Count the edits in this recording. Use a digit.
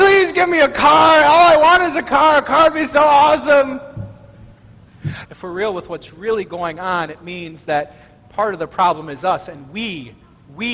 1